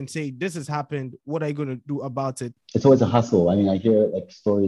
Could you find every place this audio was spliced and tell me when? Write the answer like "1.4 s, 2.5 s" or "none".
2.5 s